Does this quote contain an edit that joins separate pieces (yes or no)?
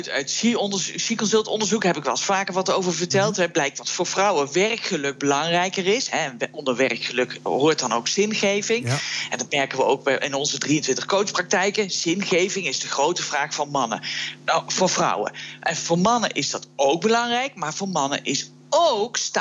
no